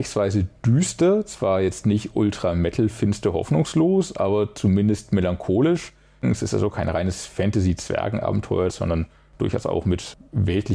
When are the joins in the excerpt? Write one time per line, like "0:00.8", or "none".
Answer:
0:06.2
0:08.7